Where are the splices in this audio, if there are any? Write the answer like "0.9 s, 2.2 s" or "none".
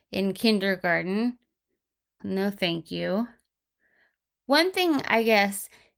2.2 s